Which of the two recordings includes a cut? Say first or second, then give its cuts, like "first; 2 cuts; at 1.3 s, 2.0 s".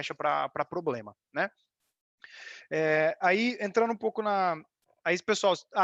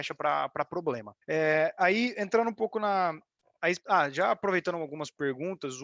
second; 2 cuts; at 1.2 s, 3.8 s